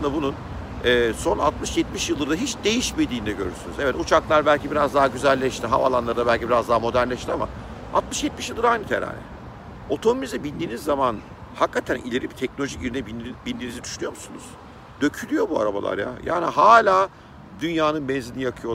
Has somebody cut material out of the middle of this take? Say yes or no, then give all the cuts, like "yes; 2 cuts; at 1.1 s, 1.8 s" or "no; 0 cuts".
no; 0 cuts